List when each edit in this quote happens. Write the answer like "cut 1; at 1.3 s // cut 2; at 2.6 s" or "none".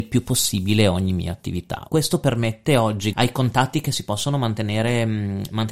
cut 1; at 1.9 s // cut 2; at 3.1 s